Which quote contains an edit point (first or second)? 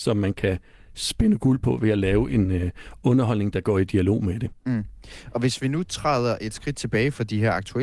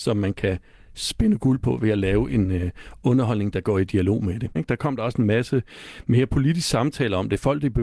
second